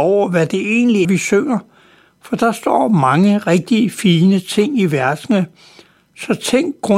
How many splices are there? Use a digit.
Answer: 1